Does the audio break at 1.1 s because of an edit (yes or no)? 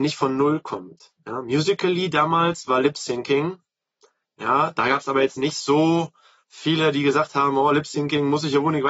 no